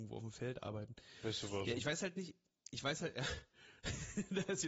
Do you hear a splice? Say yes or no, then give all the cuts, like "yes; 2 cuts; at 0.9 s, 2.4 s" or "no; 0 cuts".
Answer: no; 0 cuts